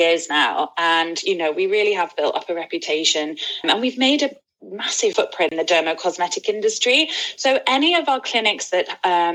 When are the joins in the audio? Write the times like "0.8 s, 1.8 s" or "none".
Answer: 3.6 s